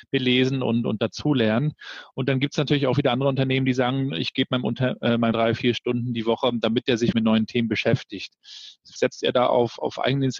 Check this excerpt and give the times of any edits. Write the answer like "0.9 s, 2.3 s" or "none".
5.3 s, 7.1 s, 9.0 s